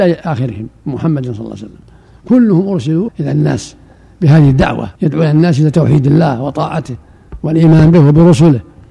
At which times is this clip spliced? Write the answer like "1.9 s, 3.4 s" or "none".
3.1 s, 5.0 s

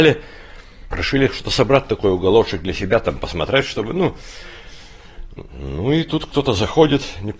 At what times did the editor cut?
0.9 s

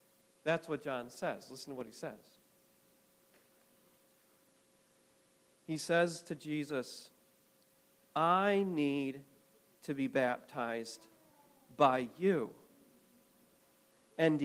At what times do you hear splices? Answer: none

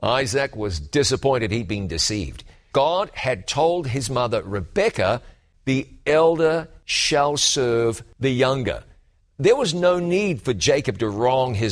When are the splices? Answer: 2.7 s

